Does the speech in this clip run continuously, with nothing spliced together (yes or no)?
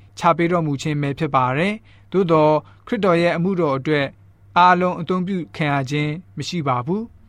yes